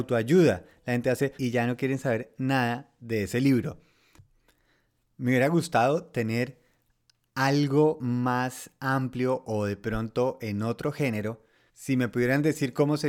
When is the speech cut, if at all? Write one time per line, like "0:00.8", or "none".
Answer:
0:01.4
0:11.7